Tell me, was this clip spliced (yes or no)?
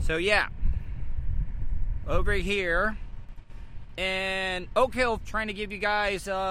yes